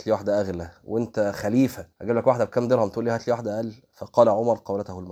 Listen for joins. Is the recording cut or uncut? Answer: cut